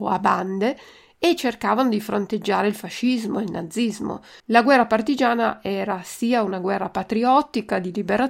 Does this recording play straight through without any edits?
no; 1 cut; at 4.4 s

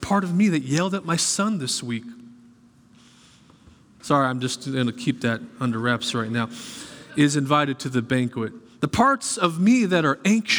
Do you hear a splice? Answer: yes; 1 cut; at 4.0 s

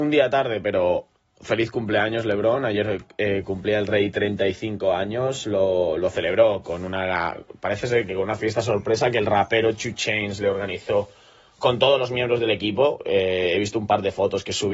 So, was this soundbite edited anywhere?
no; 0 cuts

